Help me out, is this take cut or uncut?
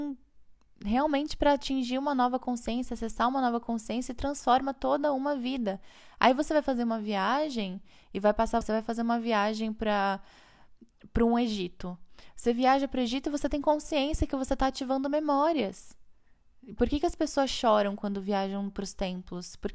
cut